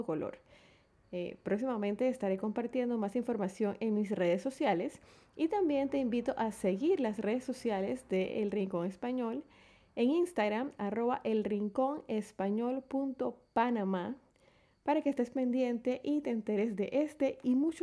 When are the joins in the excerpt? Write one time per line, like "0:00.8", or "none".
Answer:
none